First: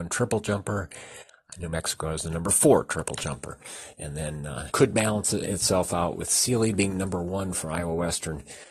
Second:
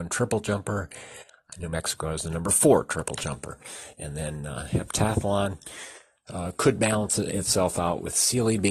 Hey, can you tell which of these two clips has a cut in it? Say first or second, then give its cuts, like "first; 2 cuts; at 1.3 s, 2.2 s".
first; 1 cut; at 4.7 s